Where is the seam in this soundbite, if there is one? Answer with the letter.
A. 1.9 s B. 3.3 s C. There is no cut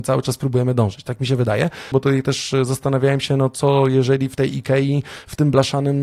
A